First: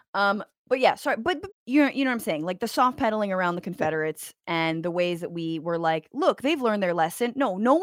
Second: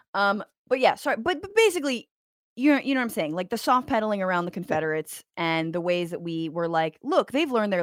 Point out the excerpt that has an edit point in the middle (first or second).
first